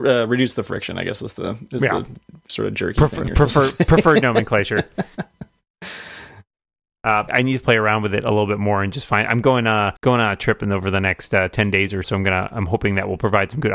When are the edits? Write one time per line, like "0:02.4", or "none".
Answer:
0:07.3
0:10.0
0:12.0